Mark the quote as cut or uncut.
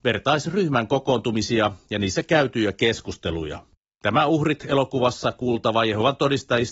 cut